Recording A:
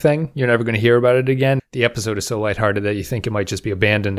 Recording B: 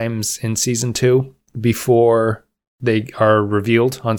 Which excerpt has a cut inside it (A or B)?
A